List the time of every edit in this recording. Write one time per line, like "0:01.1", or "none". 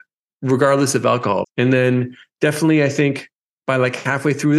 0:01.4